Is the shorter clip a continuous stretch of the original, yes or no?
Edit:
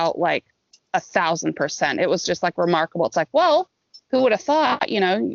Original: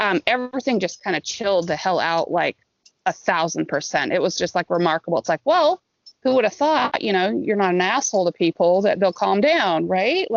yes